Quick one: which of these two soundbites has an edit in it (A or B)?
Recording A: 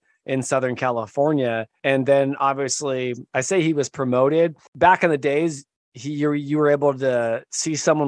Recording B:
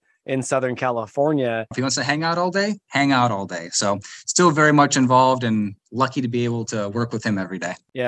B